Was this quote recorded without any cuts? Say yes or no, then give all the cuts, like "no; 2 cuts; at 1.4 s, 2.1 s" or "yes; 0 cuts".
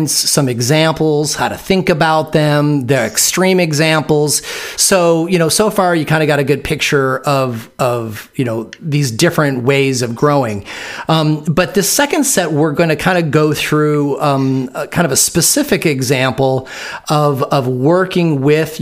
yes; 0 cuts